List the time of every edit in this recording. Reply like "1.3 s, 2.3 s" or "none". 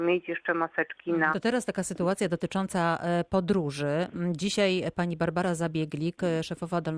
1.3 s